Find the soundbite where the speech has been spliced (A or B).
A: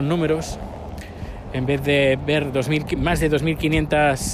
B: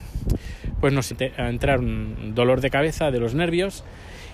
B